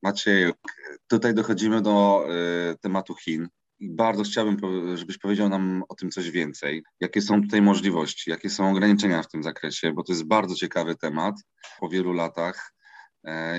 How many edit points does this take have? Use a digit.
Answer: 2